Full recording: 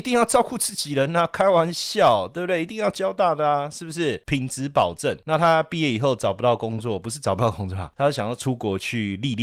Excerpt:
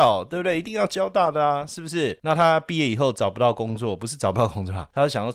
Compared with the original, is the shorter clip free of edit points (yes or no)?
no